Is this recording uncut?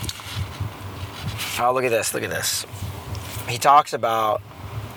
yes; 0 cuts

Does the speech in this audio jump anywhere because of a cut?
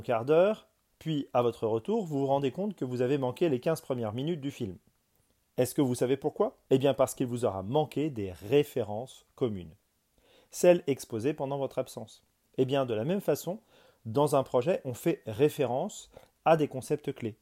yes; 2 cuts; at 5.4 s, 6.6 s

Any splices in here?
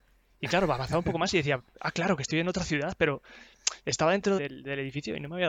yes; 1 cut; at 4.4 s

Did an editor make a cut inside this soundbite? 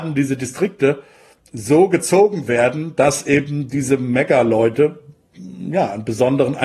no; 0 cuts

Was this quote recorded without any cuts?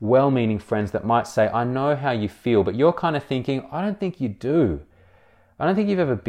yes; 0 cuts

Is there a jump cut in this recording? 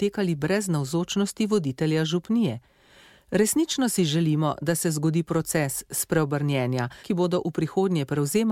yes; 1 cut; at 7.0 s

